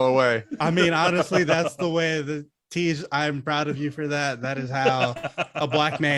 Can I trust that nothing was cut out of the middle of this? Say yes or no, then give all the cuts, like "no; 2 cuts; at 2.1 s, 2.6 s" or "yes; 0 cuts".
no; 1 cut; at 2.5 s